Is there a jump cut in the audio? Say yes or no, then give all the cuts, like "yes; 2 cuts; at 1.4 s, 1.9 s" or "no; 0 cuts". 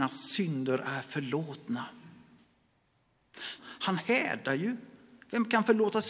yes; 1 cut; at 3.6 s